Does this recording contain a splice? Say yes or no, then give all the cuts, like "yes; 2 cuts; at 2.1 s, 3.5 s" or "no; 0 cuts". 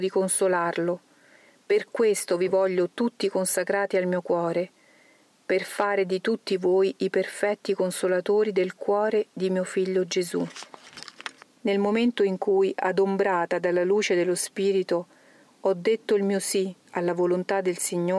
yes; 2 cuts; at 11.4 s, 16.8 s